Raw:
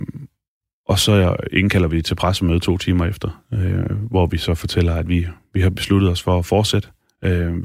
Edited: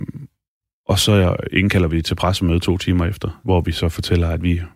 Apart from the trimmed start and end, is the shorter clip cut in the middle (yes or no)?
yes